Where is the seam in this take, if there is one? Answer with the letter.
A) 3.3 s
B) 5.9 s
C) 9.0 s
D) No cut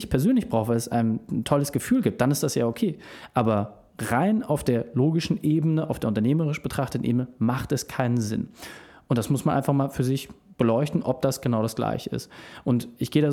D